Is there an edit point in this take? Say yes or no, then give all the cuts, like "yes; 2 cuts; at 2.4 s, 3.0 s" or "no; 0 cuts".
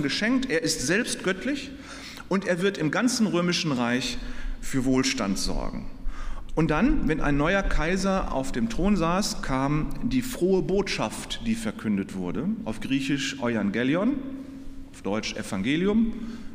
yes; 1 cut; at 6.5 s